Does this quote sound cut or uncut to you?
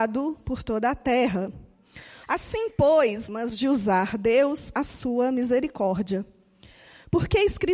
cut